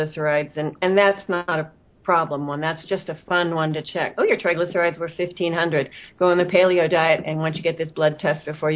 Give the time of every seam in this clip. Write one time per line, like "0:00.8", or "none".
none